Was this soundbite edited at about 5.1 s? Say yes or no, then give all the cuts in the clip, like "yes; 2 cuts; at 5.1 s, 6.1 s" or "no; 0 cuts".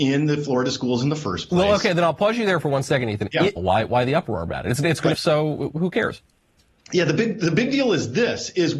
yes; 2 cuts; at 3.6 s, 5.1 s